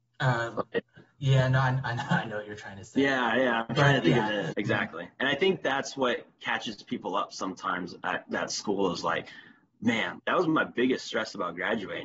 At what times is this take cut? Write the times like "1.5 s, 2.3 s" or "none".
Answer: 4.5 s, 10.2 s